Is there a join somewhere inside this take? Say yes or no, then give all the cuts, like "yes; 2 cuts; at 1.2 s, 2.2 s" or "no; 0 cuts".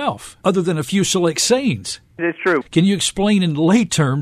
yes; 1 cut; at 2.6 s